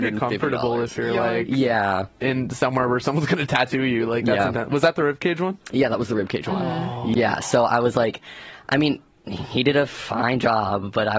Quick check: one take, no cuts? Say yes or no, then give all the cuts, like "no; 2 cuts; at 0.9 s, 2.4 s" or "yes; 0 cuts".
yes; 0 cuts